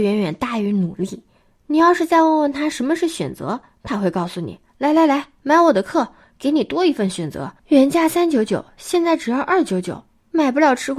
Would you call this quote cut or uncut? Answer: uncut